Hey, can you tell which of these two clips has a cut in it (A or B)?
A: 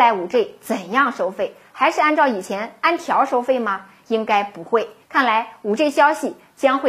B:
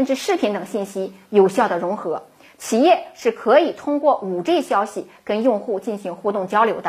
A